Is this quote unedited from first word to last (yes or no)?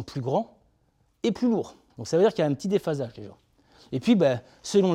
no